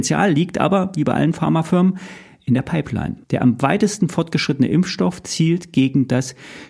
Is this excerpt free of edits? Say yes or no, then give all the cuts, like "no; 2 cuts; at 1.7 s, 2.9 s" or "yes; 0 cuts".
no; 1 cut; at 3.2 s